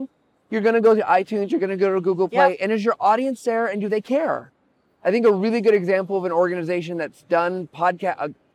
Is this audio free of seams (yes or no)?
yes